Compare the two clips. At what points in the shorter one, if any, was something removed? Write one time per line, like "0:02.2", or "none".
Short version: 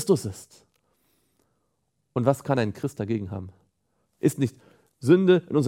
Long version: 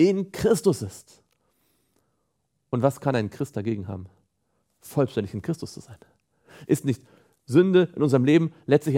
0:04.2